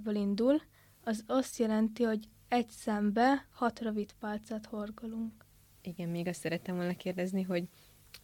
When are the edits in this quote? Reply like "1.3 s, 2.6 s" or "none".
5.8 s